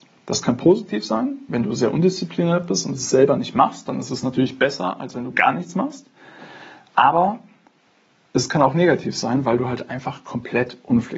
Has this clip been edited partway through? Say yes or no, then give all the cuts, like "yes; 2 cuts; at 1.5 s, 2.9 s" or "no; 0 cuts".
no; 0 cuts